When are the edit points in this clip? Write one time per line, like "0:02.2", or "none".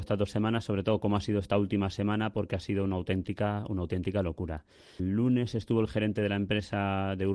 0:05.0